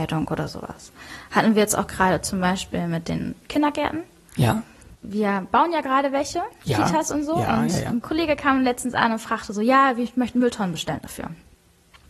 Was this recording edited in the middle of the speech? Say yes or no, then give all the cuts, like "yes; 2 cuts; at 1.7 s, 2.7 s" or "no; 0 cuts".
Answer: no; 0 cuts